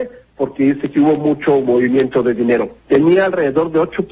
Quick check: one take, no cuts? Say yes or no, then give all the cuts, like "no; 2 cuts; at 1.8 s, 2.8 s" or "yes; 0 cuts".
no; 1 cut; at 2.8 s